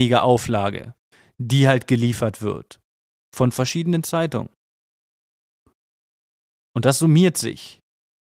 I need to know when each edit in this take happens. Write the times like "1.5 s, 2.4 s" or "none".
none

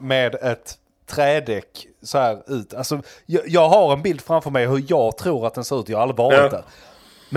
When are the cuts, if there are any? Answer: none

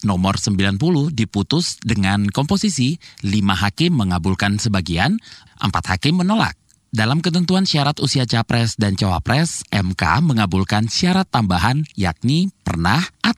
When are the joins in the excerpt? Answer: none

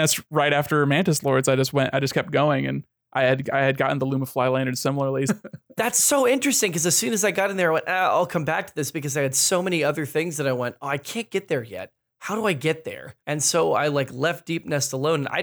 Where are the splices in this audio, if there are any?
5.3 s, 13.2 s

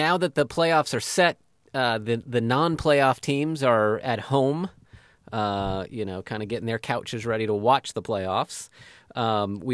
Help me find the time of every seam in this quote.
none

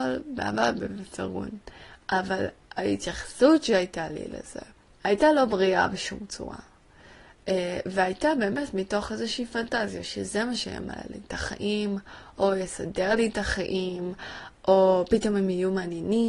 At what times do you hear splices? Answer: none

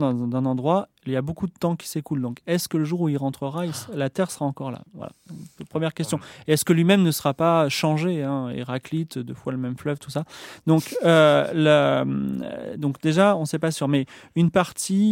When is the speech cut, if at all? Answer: none

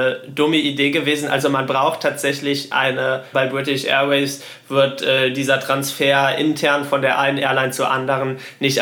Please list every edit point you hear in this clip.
3.3 s

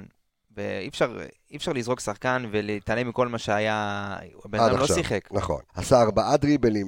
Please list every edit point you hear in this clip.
5.7 s

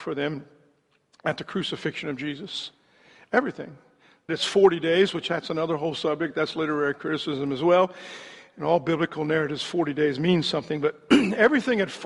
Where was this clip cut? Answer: 4.3 s

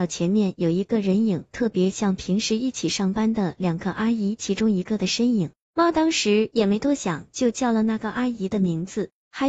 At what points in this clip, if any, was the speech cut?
5.6 s

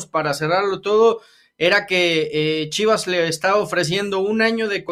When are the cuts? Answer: none

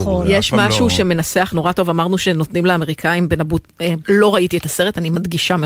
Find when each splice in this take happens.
4.0 s

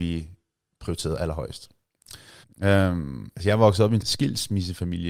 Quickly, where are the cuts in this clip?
2.4 s, 4.0 s

